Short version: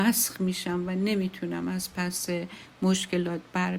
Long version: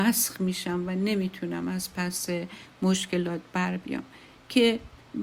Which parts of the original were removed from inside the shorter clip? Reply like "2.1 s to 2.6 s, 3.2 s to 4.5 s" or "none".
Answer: none